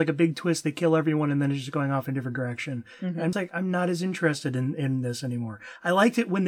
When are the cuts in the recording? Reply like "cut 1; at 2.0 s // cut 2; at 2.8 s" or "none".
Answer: cut 1; at 3.3 s